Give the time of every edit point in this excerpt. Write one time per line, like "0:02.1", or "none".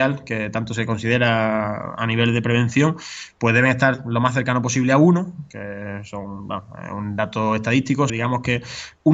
0:08.1